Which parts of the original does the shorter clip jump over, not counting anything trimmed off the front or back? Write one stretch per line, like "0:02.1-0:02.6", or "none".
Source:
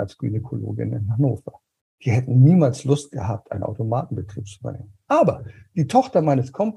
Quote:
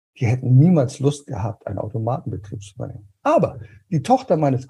none